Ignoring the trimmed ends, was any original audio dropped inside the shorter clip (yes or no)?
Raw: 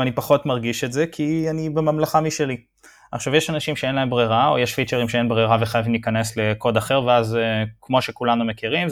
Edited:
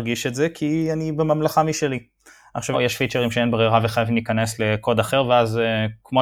yes